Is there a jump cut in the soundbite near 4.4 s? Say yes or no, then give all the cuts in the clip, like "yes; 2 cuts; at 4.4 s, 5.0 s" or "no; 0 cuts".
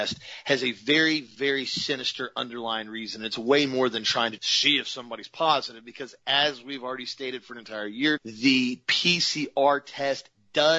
yes; 2 cuts; at 4.4 s, 8.2 s